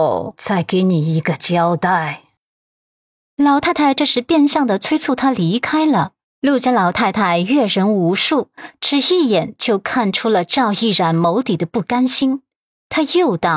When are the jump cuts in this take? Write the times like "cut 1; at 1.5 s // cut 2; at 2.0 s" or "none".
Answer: cut 1; at 6.2 s